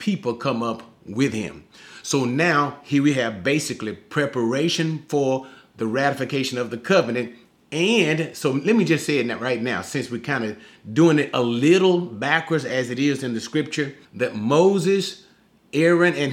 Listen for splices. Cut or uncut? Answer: cut